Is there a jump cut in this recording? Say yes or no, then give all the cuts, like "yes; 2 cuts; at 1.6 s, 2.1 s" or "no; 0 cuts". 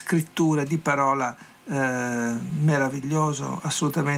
no; 0 cuts